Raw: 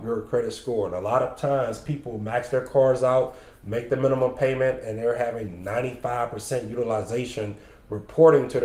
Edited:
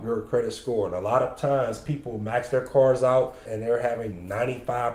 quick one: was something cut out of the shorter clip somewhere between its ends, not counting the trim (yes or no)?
yes